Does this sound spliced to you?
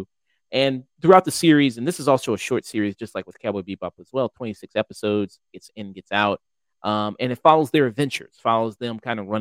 no; 0 cuts

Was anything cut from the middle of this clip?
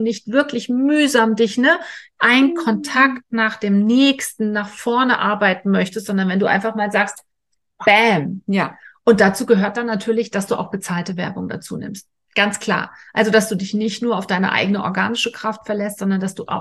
no; 0 cuts

